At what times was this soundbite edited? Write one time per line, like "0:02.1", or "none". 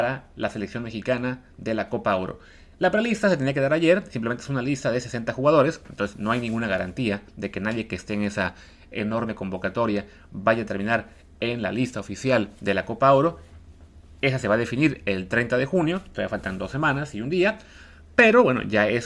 none